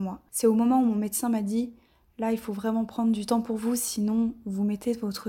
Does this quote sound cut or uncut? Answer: uncut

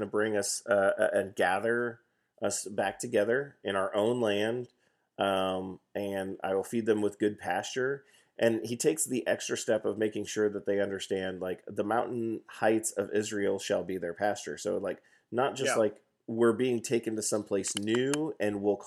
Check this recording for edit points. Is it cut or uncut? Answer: uncut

